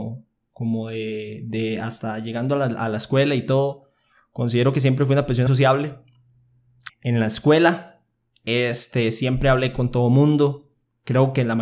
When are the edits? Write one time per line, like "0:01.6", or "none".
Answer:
0:05.5
0:06.9